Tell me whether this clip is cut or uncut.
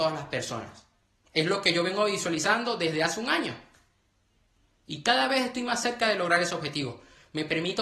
uncut